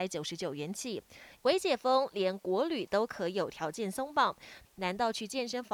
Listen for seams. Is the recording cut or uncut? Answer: cut